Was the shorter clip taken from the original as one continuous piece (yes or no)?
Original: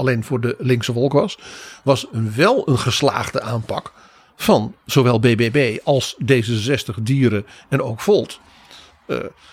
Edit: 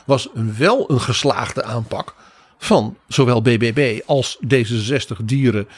yes